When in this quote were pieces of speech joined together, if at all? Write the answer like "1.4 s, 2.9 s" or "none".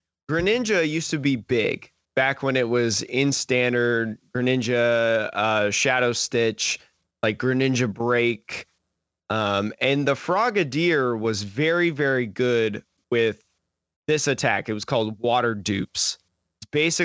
none